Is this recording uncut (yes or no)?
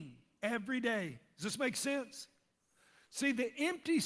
yes